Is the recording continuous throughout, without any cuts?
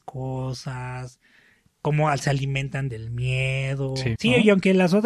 no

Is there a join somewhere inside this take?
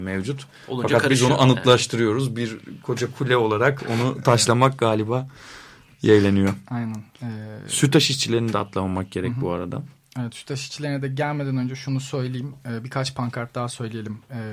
no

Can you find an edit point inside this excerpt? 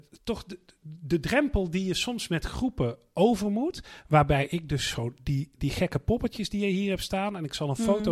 no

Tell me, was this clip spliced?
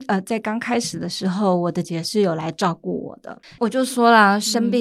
yes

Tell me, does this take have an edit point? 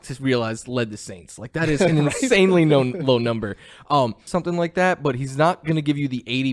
yes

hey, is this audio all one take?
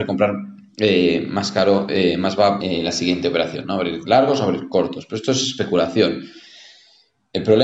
no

